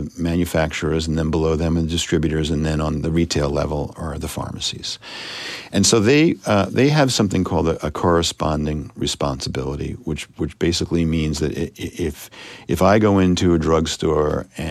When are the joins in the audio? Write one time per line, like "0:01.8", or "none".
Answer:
0:03.9